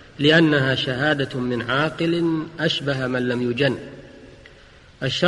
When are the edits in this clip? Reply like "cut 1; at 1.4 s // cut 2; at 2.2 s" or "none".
none